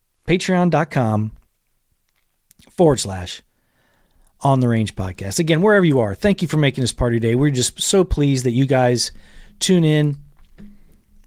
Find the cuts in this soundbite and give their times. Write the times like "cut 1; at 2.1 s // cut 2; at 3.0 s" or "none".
none